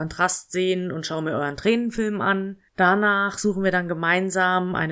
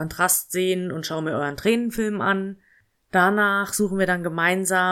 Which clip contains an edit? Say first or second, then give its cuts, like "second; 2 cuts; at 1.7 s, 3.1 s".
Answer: first; 1 cut; at 2.7 s